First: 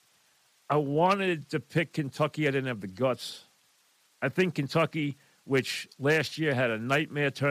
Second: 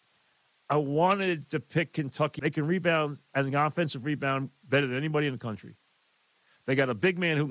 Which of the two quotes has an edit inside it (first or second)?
second